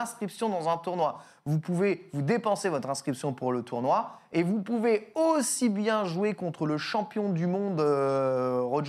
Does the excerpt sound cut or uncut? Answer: uncut